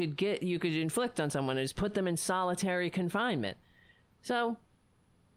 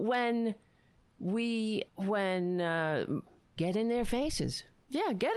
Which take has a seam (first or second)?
second